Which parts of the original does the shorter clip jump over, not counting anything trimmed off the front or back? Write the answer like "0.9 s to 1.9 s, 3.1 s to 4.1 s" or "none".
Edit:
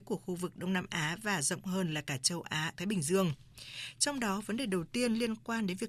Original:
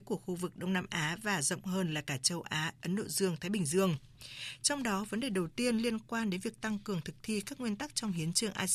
2.7 s to 3.4 s